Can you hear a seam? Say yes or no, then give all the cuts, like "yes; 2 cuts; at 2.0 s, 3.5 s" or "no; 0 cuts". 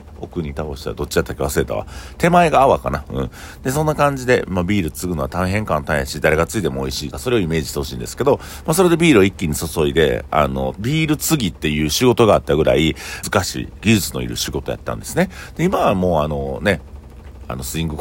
yes; 3 cuts; at 7.1 s, 10.7 s, 13.2 s